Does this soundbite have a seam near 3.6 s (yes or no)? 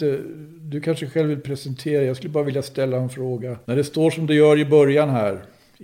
yes